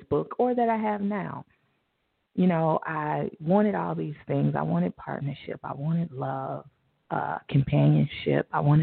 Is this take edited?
no; 0 cuts

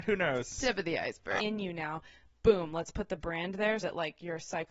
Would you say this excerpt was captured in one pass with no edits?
no; 2 cuts; at 1.4 s, 3.8 s

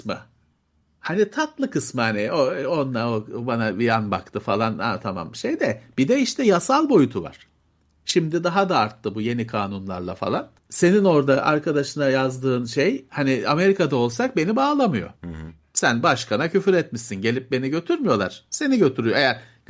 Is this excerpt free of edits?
no; 2 cuts; at 10.6 s, 15.2 s

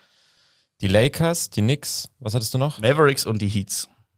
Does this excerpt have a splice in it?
no; 0 cuts

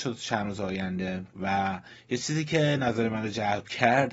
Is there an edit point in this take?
yes; 1 cut; at 1.3 s

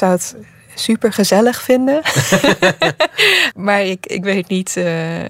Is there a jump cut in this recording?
yes; 1 cut; at 3.5 s

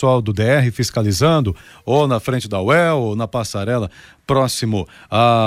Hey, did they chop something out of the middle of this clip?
no; 0 cuts

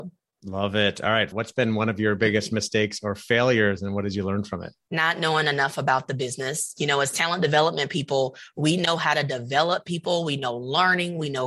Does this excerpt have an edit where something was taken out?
yes; 1 cut; at 1.3 s

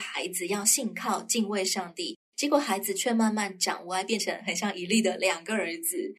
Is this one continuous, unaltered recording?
yes; 0 cuts

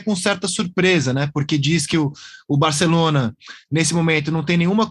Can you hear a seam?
no; 0 cuts

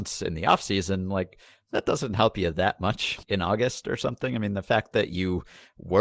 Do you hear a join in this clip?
yes; 1 cut; at 3.2 s

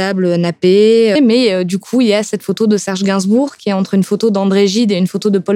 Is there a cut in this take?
yes; 1 cut; at 1.2 s

